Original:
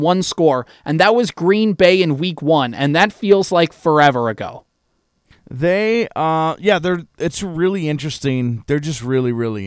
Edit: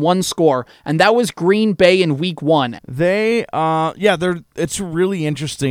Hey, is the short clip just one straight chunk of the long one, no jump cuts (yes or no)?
no